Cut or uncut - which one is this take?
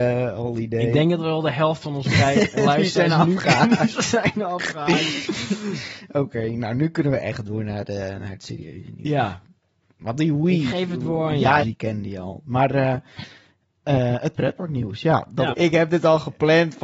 cut